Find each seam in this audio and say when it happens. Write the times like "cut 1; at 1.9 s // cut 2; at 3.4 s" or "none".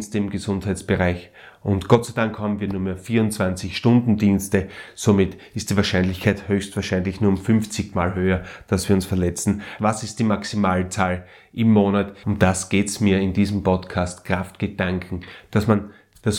cut 1; at 9.8 s // cut 2; at 12.2 s